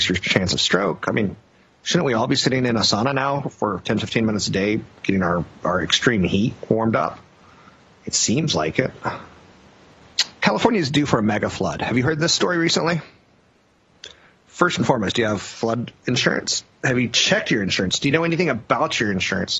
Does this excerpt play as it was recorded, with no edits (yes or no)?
yes